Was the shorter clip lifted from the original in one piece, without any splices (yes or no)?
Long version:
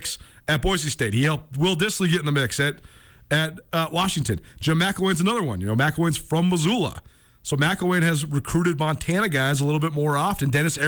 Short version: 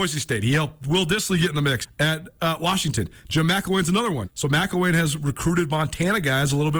no